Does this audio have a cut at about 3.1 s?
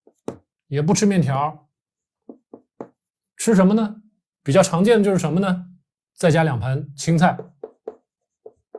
no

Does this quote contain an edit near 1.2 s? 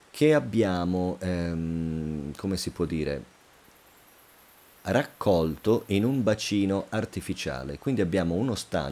no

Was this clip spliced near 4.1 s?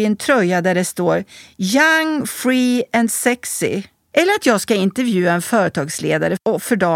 yes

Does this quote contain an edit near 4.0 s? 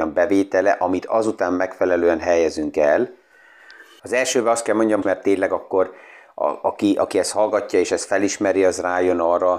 yes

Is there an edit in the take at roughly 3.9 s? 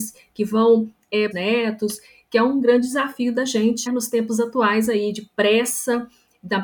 yes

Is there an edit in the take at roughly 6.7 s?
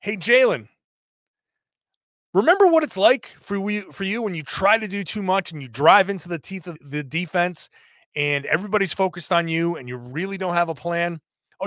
yes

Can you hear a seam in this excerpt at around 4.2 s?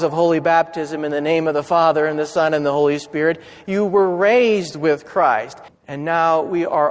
no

